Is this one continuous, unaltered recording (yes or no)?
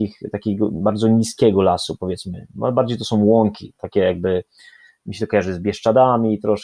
yes